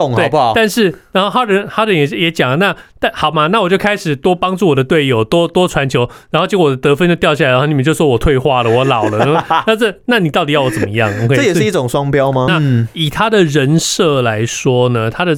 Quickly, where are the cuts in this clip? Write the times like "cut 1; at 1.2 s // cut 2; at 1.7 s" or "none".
cut 1; at 12.5 s